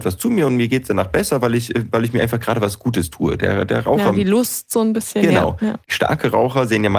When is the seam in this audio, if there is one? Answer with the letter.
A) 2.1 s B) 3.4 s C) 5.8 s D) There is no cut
C